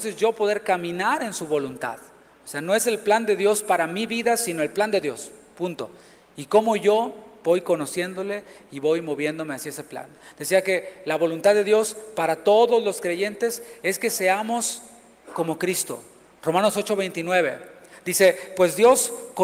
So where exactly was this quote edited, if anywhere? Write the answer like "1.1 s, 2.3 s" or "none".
none